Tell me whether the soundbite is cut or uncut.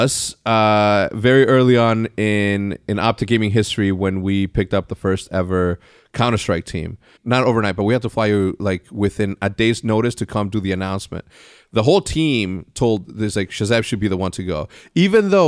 cut